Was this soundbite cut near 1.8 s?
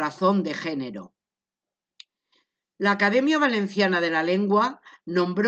no; 0 cuts

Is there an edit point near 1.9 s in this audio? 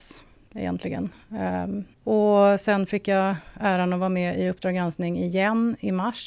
yes; 1 cut; at 1.9 s

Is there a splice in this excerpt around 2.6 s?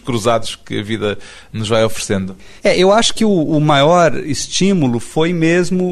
yes; 1 cut; at 2.6 s

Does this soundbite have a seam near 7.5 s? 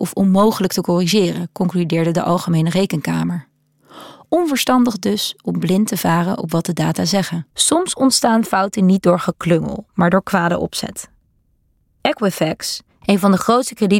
yes; 1 cut; at 7.5 s

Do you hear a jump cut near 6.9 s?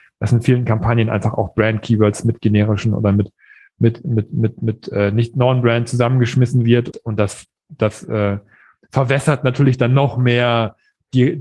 yes; 1 cut; at 6.9 s

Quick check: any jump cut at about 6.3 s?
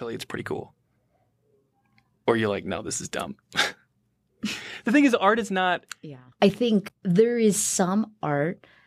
yes; 1 cut; at 6.3 s

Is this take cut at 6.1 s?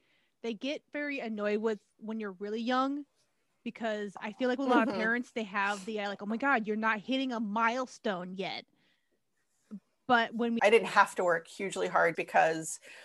no; 2 cuts; at 10.6 s, 12.1 s

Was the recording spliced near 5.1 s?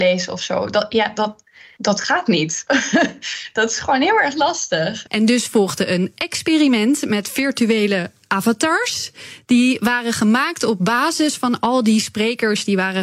yes; 1 cut; at 5.1 s

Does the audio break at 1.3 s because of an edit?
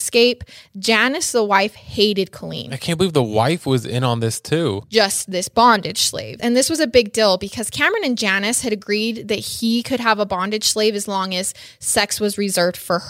no; 2 cuts; at 4.8 s, 6.4 s

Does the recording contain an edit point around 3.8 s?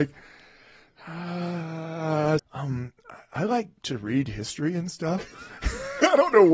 yes; 2 cuts; at 2.4 s, 3.8 s

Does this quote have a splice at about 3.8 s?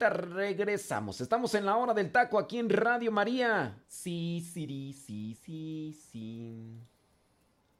yes; 2 cuts; at 3.8 s, 5.4 s

